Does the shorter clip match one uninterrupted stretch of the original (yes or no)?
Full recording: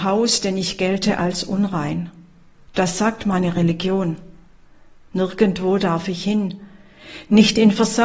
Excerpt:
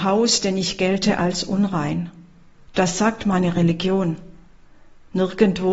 yes